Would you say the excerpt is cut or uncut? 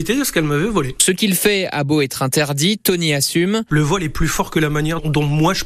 uncut